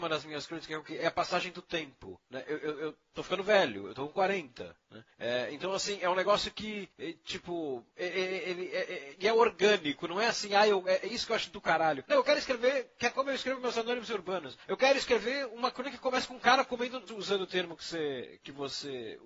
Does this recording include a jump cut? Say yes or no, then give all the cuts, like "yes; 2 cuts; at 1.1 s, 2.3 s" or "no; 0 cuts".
yes; 2 cuts; at 12.0 s, 17.1 s